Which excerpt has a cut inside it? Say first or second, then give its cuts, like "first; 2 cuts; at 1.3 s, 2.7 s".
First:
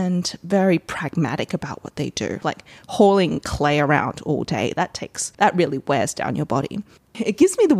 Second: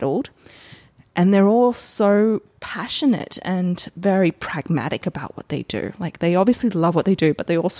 first; 2 cuts; at 2.4 s, 5.3 s